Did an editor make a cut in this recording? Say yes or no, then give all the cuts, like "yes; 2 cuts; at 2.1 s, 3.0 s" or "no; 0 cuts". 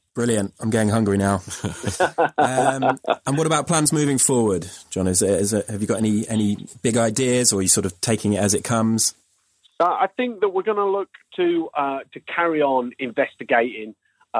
no; 0 cuts